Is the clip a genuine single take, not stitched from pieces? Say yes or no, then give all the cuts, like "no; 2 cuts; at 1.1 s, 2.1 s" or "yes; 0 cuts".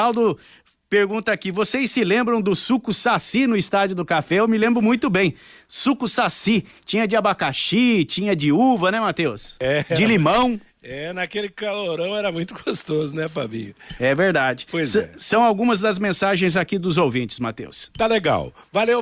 yes; 0 cuts